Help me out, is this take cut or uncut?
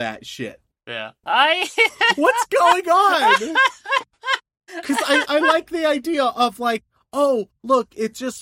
cut